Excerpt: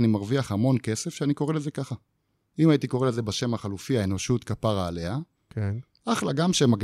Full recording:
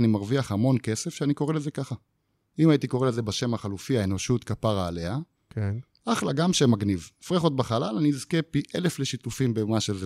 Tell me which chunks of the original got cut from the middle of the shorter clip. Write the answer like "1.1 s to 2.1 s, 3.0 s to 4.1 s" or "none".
none